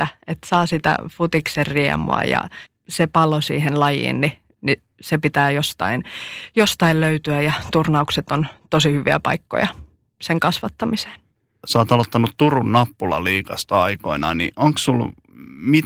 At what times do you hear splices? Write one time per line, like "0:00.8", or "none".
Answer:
none